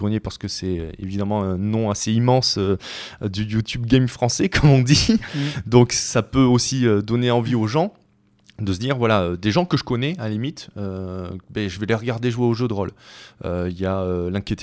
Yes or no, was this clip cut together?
no